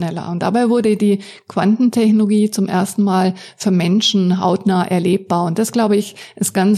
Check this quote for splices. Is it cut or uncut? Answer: uncut